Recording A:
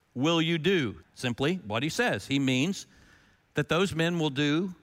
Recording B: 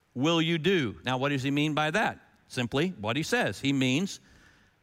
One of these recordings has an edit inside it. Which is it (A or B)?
A